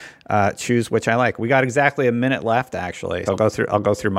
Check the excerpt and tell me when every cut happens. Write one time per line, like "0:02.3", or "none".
0:03.3